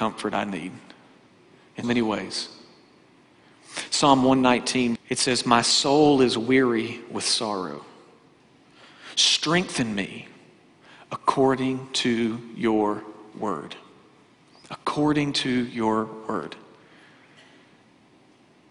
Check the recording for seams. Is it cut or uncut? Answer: cut